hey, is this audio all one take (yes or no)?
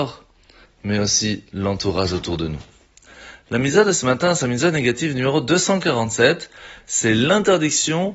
yes